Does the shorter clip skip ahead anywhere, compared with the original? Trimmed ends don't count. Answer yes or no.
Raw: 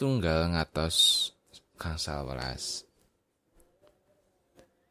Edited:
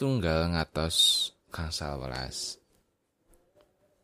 yes